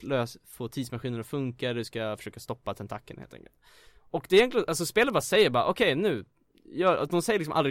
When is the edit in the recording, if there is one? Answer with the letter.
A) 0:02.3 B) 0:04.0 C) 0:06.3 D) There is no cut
D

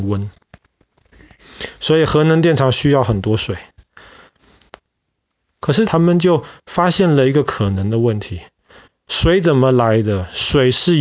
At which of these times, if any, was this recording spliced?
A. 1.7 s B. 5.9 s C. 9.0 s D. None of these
B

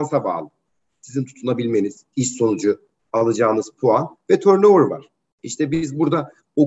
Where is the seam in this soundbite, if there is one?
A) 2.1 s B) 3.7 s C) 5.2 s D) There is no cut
A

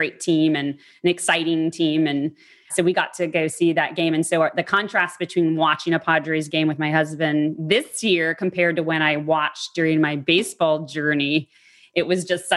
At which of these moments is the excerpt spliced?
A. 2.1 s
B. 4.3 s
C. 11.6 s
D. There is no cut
D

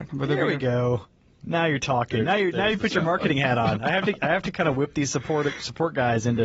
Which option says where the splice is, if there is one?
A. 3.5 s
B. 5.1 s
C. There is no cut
C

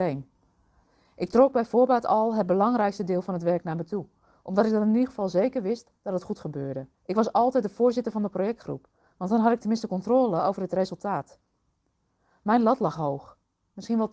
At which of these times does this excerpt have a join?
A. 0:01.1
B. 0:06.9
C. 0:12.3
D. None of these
B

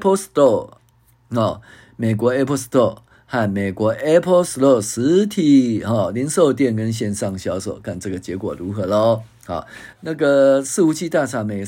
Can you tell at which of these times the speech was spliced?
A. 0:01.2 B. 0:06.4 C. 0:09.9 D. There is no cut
C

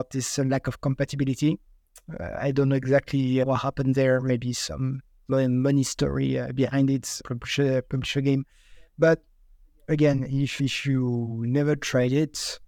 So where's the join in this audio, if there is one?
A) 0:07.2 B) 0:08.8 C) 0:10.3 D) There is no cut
D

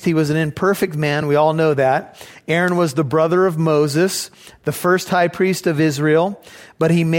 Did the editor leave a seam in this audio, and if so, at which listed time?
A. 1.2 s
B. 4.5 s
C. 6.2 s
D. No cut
D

